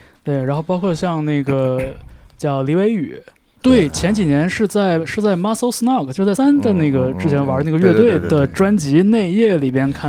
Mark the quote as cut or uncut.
cut